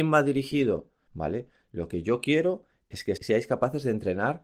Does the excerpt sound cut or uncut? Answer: cut